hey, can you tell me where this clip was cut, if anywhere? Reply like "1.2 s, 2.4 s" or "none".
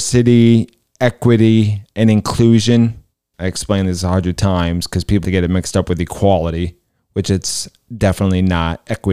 3.3 s, 5.2 s